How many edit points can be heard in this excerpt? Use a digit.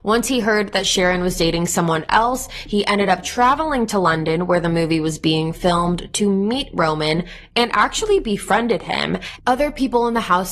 1